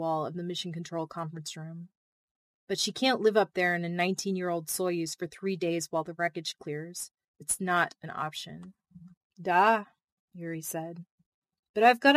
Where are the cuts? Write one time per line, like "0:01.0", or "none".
0:10.3